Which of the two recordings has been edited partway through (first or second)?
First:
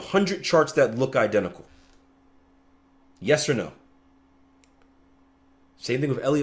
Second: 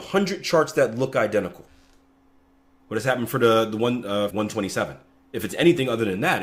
second